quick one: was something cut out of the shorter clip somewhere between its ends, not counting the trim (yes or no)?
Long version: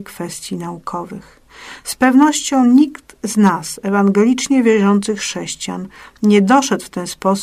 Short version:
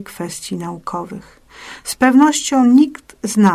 no